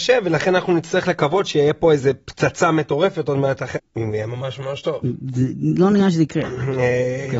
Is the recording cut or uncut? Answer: cut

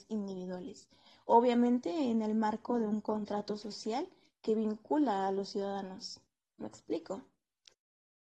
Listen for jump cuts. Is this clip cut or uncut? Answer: uncut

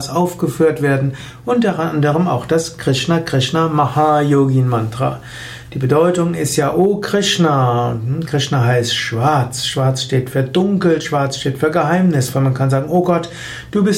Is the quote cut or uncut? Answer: uncut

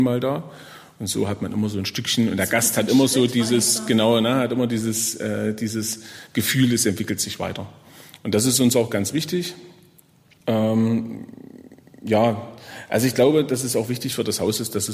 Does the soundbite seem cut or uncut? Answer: uncut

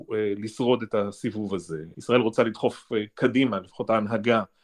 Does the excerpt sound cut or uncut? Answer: cut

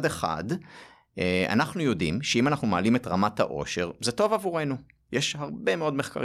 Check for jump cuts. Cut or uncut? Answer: uncut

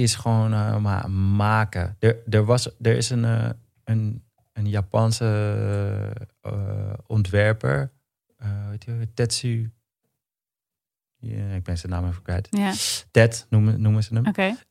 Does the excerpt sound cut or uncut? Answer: uncut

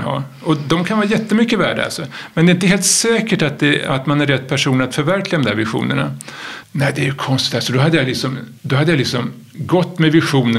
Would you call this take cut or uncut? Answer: cut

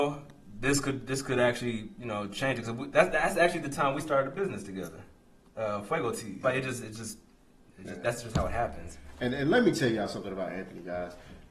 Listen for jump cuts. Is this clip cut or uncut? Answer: cut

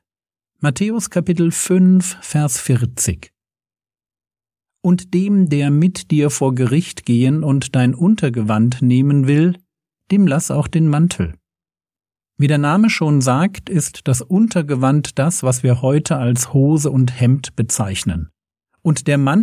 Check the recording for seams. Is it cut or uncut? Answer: uncut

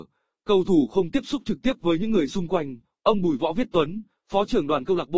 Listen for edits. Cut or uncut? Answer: uncut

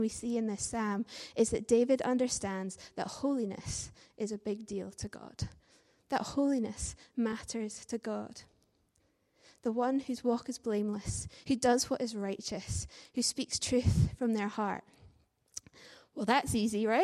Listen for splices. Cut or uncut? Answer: uncut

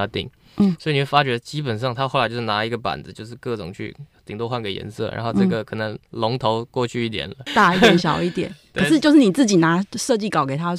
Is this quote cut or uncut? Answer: cut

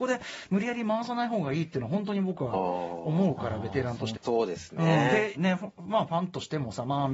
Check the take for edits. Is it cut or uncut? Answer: cut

